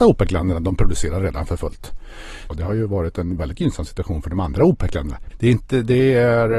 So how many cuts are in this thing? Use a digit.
2